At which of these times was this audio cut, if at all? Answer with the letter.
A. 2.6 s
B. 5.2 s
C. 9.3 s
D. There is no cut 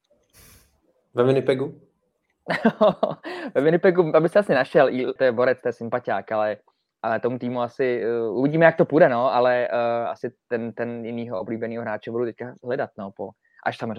B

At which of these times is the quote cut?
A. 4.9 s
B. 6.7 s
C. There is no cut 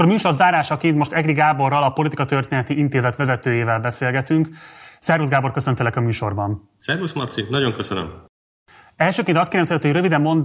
C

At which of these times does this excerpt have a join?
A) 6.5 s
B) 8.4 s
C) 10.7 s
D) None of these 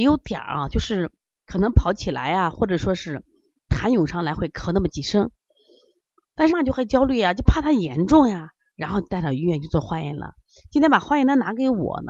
A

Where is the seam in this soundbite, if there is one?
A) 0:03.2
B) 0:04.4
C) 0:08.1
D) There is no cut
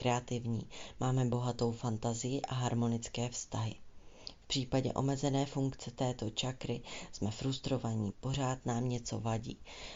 C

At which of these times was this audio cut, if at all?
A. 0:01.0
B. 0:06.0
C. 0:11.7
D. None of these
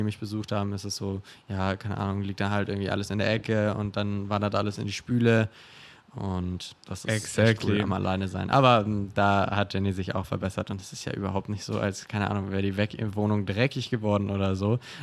D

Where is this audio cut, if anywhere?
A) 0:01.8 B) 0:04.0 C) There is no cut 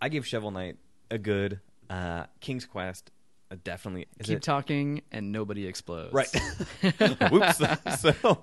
B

